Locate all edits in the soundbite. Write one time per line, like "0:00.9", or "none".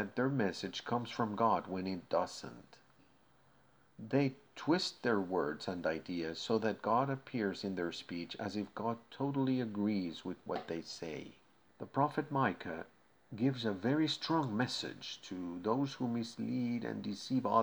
0:11.7